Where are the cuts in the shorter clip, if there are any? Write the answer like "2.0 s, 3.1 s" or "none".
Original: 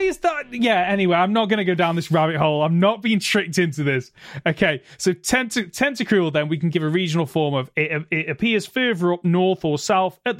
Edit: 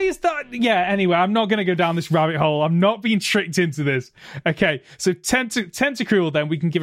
none